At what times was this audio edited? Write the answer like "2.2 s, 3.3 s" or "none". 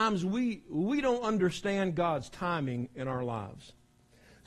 none